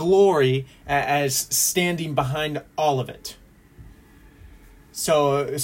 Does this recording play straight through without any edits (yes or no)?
yes